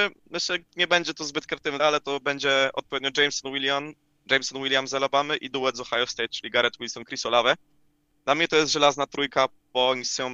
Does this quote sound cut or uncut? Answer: cut